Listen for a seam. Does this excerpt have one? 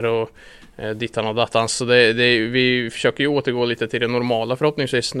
no; 0 cuts

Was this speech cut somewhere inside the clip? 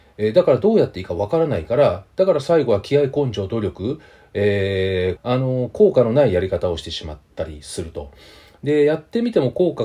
yes; 1 cut; at 5.2 s

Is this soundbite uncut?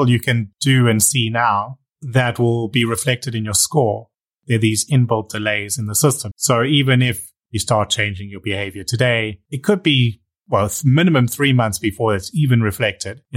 no; 1 cut; at 6.3 s

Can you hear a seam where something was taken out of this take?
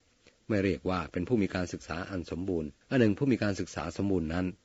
yes; 1 cut; at 2.8 s

